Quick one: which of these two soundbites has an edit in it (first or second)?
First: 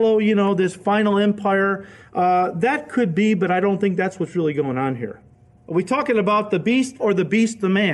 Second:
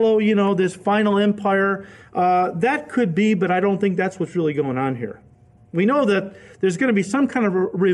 first